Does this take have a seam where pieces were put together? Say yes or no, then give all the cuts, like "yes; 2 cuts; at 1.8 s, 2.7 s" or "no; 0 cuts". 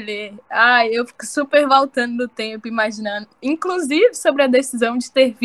no; 0 cuts